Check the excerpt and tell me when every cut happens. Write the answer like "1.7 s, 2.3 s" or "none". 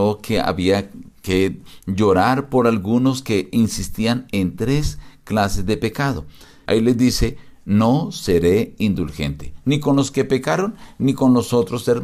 6.7 s